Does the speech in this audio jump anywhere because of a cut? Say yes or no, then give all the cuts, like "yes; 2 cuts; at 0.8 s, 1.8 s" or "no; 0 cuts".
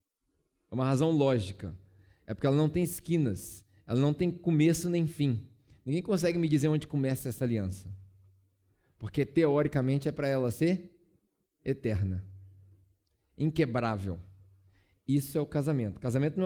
no; 0 cuts